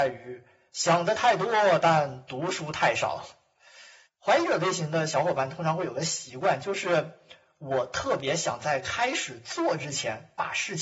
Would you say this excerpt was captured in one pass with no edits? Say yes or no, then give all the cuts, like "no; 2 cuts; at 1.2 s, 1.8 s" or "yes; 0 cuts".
no; 1 cut; at 4.0 s